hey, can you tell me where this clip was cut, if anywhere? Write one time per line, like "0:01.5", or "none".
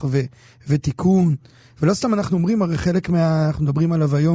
none